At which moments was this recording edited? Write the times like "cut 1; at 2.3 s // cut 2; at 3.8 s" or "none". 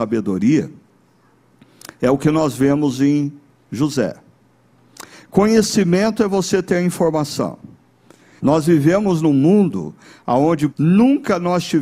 cut 1; at 8.4 s // cut 2; at 10.7 s